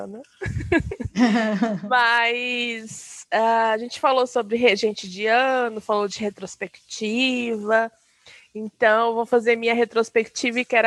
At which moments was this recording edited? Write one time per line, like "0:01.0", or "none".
none